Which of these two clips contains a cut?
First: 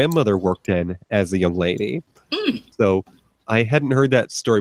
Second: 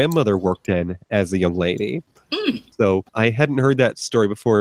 second; 1 cut; at 3.1 s

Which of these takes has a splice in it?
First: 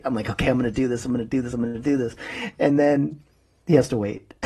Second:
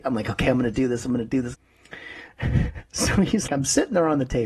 second; 2 cuts; at 1.5 s, 3.5 s

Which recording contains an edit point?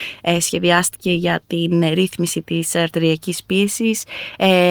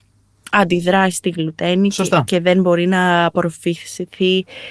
second; 1 cut; at 1.1 s

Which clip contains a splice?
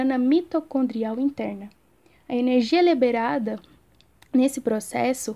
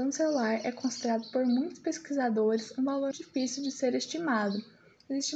second; 1 cut; at 3.1 s

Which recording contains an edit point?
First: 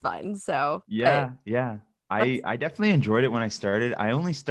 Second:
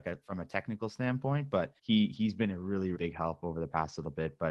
second; 2 cuts; at 1.8 s, 3.0 s

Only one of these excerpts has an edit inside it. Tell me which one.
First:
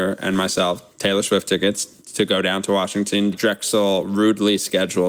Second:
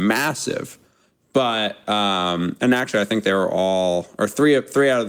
first; 1 cut; at 3.3 s

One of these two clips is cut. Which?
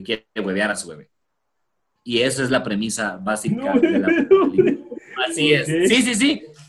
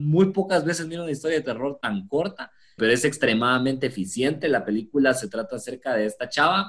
second; 1 cut; at 2.8 s

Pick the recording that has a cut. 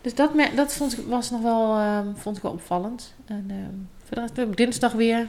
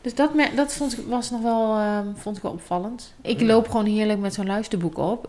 second; 1 cut; at 3.2 s

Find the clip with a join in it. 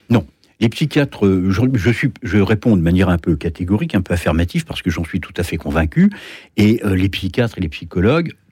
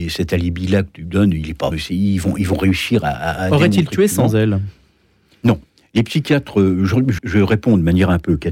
second; 2 cuts; at 1.7 s, 7.2 s

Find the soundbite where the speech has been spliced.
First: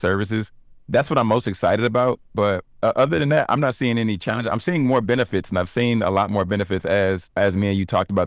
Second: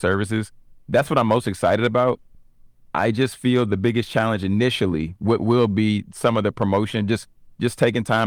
first; 1 cut; at 2.3 s

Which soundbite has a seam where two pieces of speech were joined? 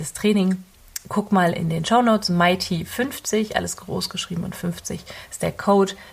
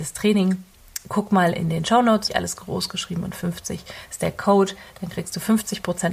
second; 1 cut; at 2.3 s

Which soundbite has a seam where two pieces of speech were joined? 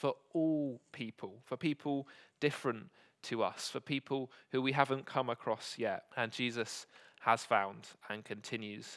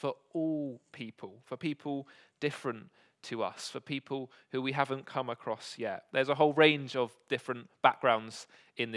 first; 1 cut; at 6.1 s

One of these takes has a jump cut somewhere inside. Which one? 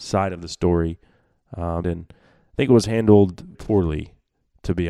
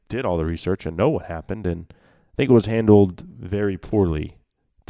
first; 2 cuts; at 1.8 s, 3.5 s

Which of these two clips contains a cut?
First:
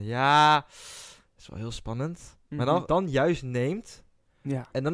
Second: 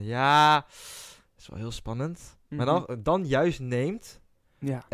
first; 1 cut; at 2.9 s

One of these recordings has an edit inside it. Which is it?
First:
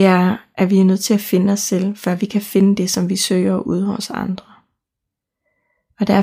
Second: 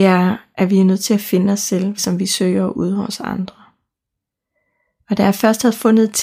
second; 1 cut; at 2.0 s

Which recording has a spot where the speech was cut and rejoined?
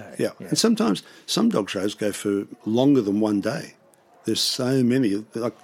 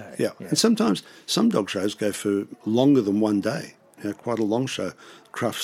second; 1 cut; at 4.0 s

